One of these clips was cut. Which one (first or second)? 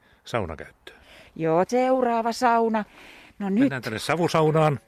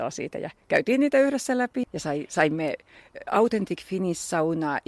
second